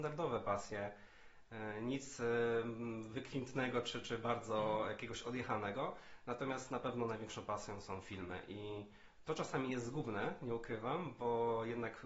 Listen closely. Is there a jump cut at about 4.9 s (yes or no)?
no